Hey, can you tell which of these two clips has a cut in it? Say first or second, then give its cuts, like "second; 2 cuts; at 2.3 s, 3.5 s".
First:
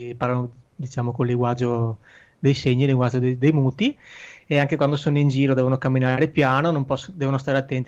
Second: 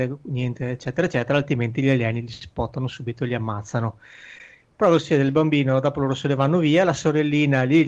second; 1 cut; at 4.6 s